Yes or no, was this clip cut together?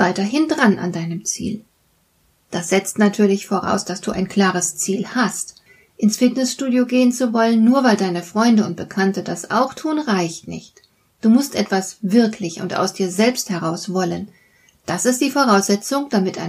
no